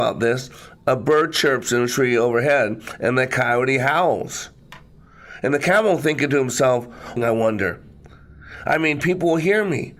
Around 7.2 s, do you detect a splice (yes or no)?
yes